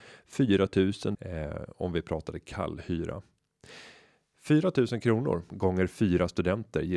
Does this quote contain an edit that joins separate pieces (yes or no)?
yes